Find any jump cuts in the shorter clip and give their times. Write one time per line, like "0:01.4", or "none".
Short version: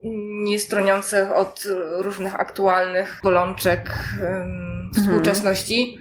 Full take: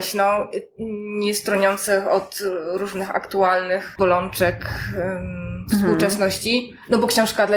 none